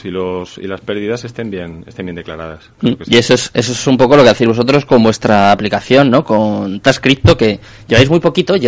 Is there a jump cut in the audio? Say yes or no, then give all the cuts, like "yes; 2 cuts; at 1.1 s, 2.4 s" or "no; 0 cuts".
no; 0 cuts